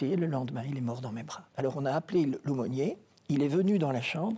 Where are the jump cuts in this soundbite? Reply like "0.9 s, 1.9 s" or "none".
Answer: 1.5 s